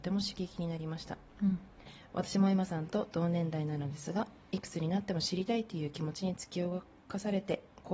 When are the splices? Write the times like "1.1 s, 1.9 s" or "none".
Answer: none